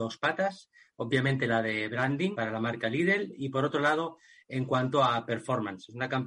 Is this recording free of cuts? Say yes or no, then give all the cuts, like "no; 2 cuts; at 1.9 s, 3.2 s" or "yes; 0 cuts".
no; 1 cut; at 2.3 s